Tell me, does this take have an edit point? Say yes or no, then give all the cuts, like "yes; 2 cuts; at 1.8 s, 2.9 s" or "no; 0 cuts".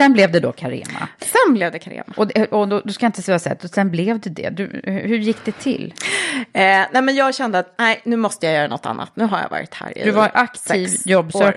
no; 0 cuts